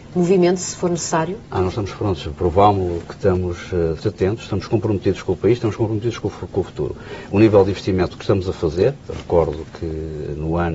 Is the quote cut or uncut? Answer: cut